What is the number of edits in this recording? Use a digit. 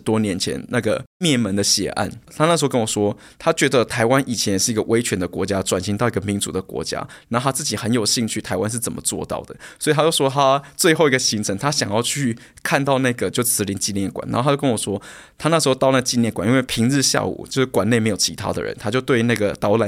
1